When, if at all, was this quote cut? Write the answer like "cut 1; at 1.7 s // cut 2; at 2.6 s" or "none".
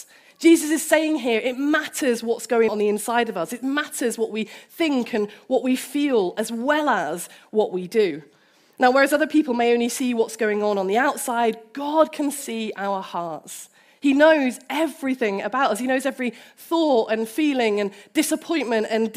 cut 1; at 2.7 s

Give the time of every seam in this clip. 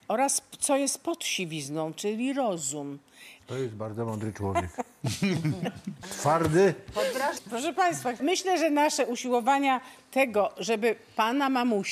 cut 1; at 3.4 s // cut 2; at 7.3 s

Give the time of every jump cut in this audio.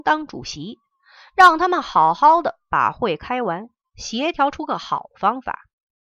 none

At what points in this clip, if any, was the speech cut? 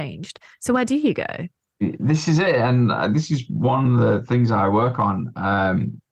none

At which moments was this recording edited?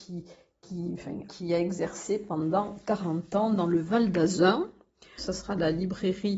cut 1; at 1.3 s // cut 2; at 5.2 s

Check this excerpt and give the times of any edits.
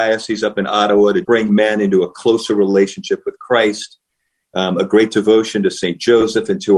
cut 1; at 1.2 s

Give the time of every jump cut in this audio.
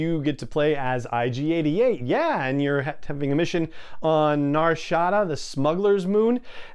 none

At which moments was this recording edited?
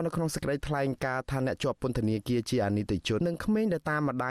cut 1; at 3.2 s

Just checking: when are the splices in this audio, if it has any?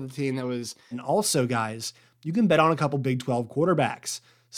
cut 1; at 0.9 s

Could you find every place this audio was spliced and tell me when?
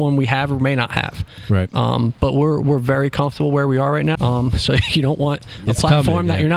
cut 1; at 4.1 s

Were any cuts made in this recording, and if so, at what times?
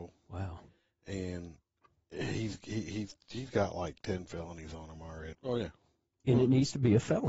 cut 1; at 5.3 s

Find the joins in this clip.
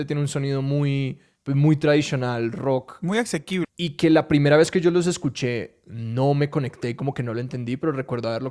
cut 1; at 3.6 s

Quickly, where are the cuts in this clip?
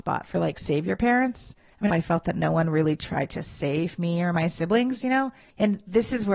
cut 1; at 1.9 s

